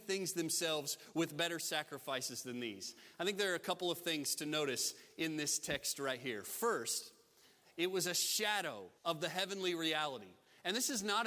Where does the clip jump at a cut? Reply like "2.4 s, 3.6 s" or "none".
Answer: 7.6 s, 9.0 s